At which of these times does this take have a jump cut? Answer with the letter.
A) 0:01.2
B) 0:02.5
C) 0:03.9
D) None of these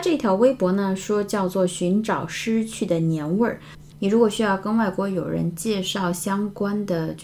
C